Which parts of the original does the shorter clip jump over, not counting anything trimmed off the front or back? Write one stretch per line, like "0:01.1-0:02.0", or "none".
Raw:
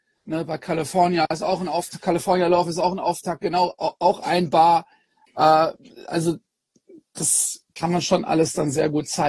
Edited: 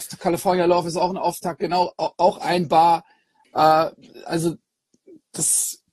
none